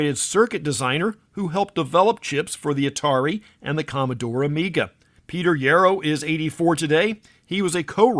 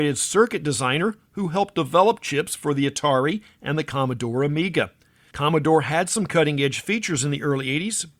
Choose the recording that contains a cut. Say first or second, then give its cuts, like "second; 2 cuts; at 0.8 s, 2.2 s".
first; 1 cut; at 5.2 s